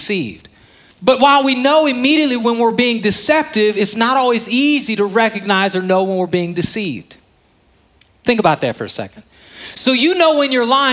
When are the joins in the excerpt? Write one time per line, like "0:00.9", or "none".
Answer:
0:00.9